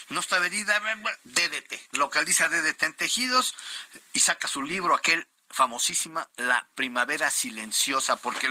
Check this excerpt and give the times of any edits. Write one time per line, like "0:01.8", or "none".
0:01.9